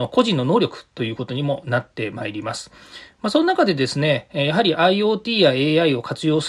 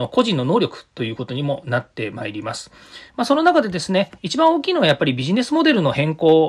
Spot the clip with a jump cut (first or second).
second